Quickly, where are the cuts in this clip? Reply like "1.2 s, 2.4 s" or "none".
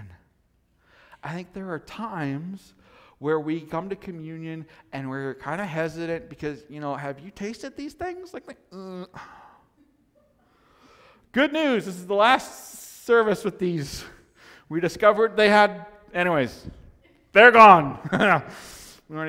none